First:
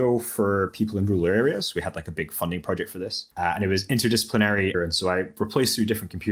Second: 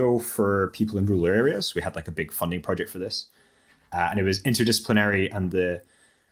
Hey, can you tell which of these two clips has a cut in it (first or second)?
first